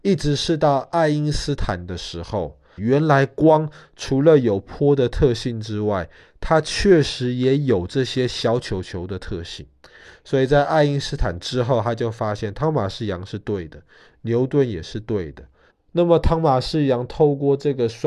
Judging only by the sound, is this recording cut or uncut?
cut